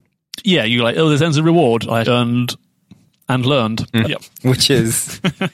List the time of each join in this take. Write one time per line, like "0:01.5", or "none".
0:02.0
0:04.0